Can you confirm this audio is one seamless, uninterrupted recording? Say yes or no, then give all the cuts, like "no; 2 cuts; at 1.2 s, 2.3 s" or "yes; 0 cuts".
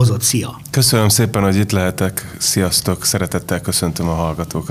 yes; 0 cuts